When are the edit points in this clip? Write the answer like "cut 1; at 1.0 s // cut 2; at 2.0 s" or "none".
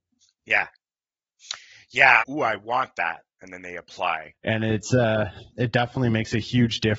cut 1; at 2.2 s // cut 2; at 4.3 s // cut 3; at 5.5 s

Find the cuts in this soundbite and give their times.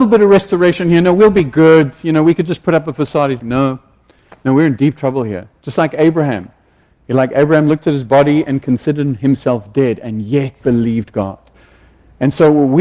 cut 1; at 3.4 s

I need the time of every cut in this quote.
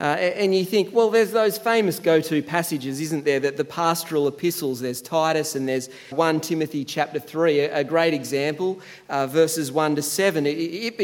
cut 1; at 6.1 s

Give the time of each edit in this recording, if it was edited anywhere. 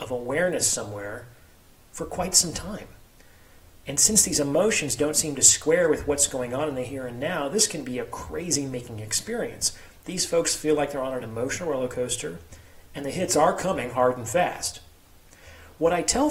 cut 1; at 3.8 s // cut 2; at 12.9 s

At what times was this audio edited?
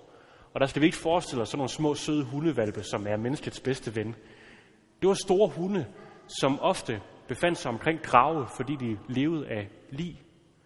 none

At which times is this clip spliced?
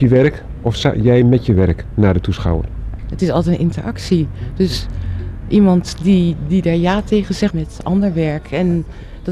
cut 1; at 7.5 s

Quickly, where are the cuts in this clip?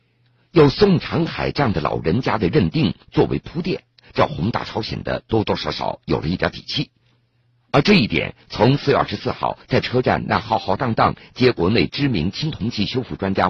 none

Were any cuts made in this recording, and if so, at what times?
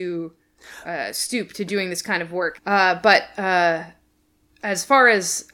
cut 1; at 2.6 s

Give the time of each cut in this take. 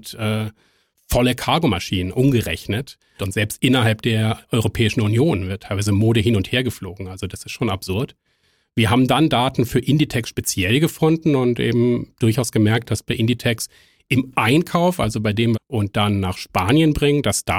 cut 1; at 3.2 s // cut 2; at 15.5 s

